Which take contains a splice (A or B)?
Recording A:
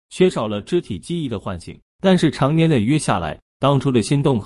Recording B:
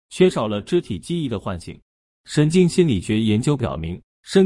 A